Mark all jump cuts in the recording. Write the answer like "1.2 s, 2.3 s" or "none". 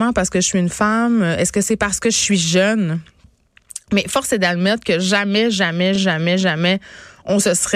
none

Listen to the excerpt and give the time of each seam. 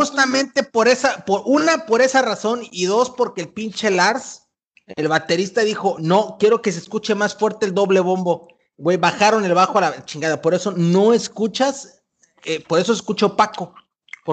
none

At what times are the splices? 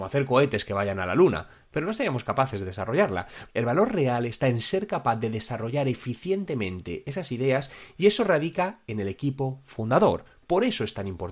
3.5 s

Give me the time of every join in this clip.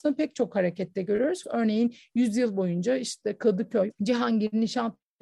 1.4 s, 3.9 s

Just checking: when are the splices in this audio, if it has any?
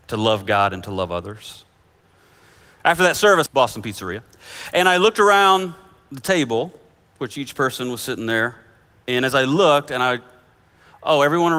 3.5 s

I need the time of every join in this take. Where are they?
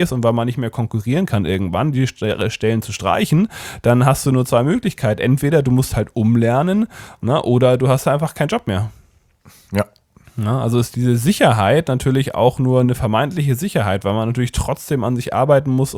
10.9 s, 12.8 s

